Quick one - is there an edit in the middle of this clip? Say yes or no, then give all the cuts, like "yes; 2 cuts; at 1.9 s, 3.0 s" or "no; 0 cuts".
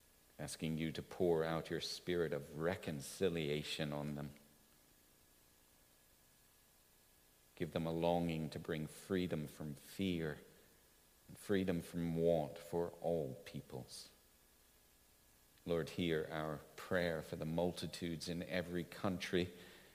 yes; 1 cut; at 15.5 s